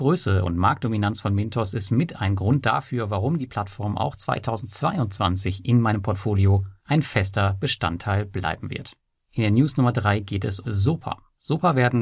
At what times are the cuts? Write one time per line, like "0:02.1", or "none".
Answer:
0:10.6